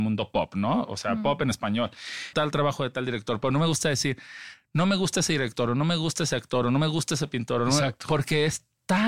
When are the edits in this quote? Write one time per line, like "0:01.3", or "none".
0:02.3